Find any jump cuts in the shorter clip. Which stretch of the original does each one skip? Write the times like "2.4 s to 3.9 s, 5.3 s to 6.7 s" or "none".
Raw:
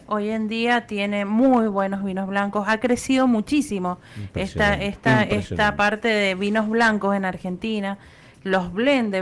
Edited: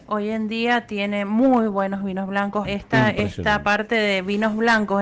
2.6 s to 4.8 s